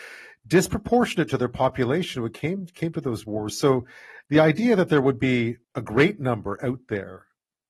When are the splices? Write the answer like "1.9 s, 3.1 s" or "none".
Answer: 5.6 s